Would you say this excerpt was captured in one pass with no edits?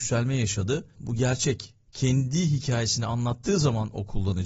no; 1 cut; at 0.9 s

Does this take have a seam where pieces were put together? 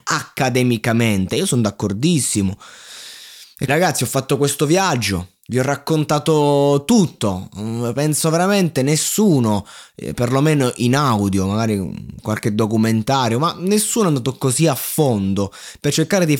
yes; 1 cut; at 3.7 s

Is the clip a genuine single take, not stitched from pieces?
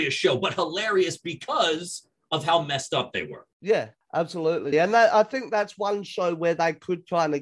no; 1 cut; at 4.7 s

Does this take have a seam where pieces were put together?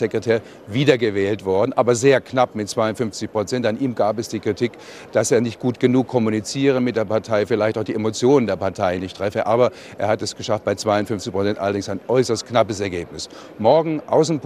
no; 0 cuts

